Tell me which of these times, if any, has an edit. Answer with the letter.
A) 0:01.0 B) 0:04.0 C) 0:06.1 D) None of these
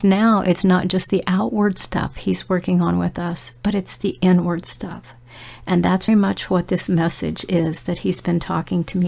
C